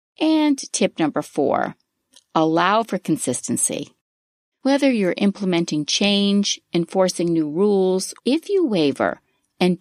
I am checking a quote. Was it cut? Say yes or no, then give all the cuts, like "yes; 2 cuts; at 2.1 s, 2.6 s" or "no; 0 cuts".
yes; 2 cuts; at 4.5 s, 8.2 s